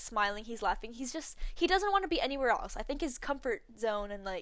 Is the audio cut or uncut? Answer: uncut